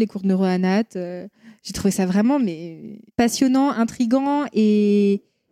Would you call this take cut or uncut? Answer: uncut